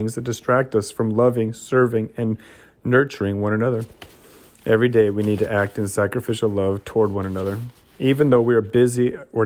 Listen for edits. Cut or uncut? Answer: uncut